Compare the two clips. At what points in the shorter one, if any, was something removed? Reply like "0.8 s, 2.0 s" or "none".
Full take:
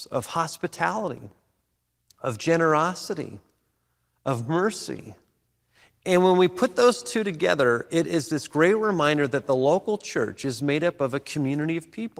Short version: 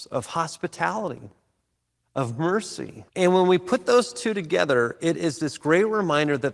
2.0 s, 3.1 s